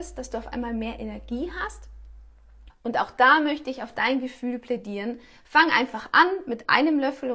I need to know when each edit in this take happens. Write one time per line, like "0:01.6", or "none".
0:02.7